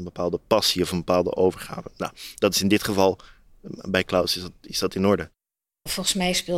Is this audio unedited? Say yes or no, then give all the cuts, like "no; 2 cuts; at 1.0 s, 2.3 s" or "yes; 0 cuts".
yes; 0 cuts